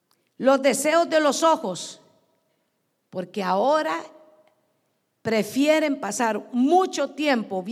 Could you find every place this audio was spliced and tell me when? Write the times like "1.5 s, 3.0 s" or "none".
none